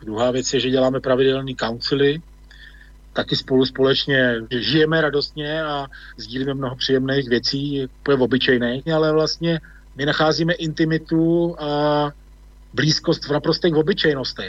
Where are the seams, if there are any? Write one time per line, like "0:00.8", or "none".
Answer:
0:04.5
0:08.9